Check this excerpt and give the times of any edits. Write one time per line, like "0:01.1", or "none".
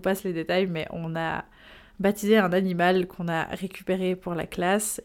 none